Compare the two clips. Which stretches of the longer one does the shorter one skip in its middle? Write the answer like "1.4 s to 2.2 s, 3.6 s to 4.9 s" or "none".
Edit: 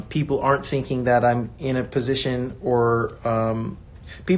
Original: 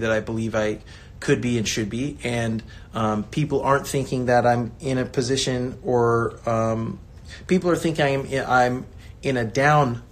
none